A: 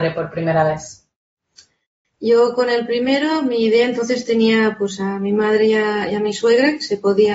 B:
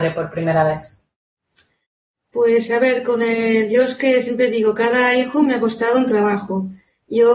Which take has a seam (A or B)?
A